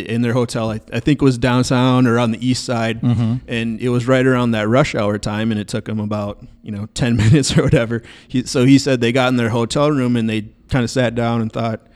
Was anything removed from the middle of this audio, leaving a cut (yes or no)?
no